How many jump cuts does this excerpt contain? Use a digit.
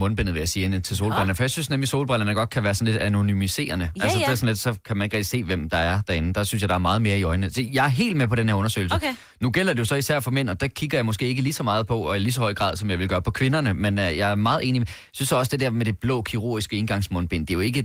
0